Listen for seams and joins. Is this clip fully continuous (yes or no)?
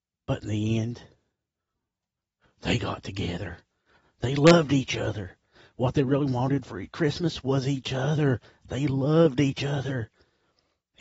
yes